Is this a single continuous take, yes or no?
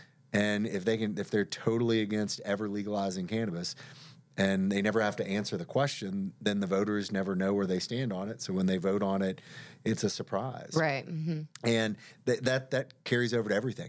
yes